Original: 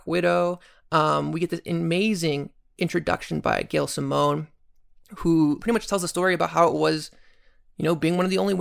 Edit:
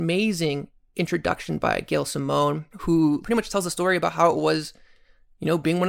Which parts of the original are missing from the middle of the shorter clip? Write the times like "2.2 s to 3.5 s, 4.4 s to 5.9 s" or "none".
4.5 s to 5.1 s